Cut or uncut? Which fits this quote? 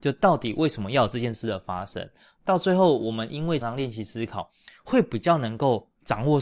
cut